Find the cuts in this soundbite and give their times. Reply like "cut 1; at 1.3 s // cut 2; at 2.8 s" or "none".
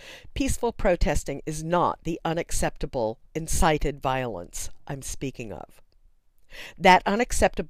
cut 1; at 3.3 s

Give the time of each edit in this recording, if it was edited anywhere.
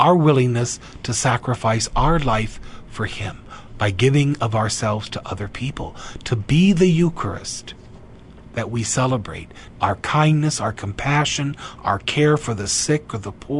cut 1; at 9.8 s

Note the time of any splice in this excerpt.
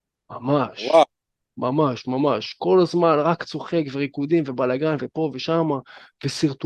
none

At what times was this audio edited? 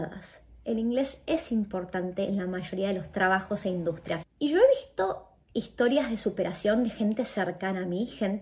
cut 1; at 4.2 s

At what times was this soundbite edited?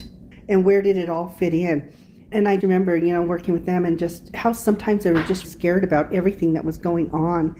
cut 1; at 2.6 s // cut 2; at 5.4 s

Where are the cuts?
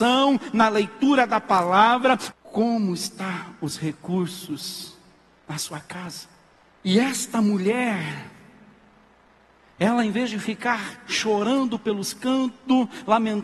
cut 1; at 2.3 s // cut 2; at 6.8 s

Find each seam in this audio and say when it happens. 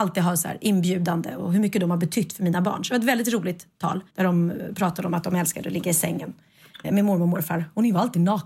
cut 1; at 4.1 s // cut 2; at 6.8 s

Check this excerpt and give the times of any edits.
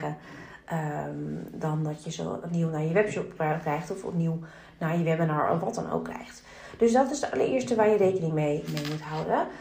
cut 1; at 8.7 s

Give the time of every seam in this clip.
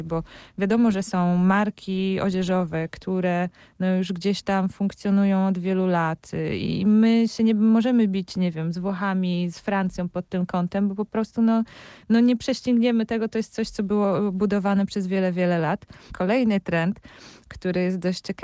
cut 1; at 9.5 s // cut 2; at 16.1 s

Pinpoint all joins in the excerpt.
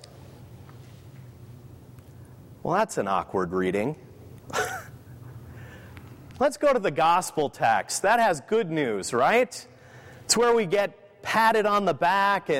none

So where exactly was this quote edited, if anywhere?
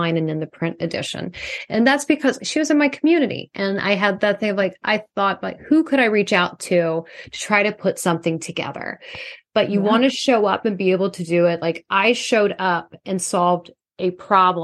none

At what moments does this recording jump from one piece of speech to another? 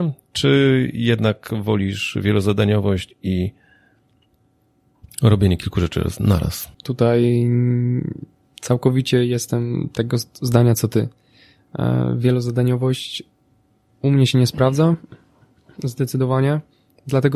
cut 1; at 6.7 s

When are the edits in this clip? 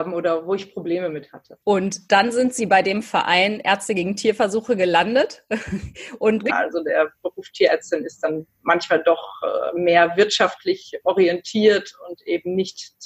cut 1; at 1.6 s // cut 2; at 6.5 s

